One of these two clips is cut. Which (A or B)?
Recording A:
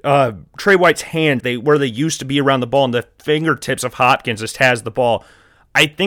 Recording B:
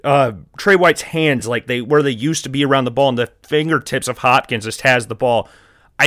A